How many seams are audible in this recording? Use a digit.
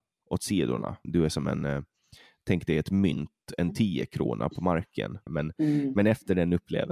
2